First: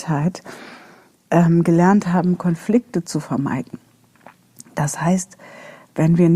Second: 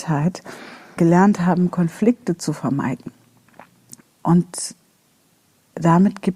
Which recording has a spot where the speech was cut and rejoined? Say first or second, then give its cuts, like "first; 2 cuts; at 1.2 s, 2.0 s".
second; 2 cuts; at 1.0 s, 4.0 s